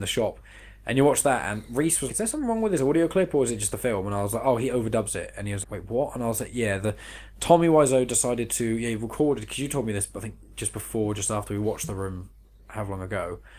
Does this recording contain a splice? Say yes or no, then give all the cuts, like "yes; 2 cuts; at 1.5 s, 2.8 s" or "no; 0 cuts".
yes; 2 cuts; at 2.1 s, 5.6 s